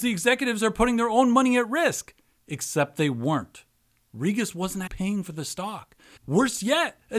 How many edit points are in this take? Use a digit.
2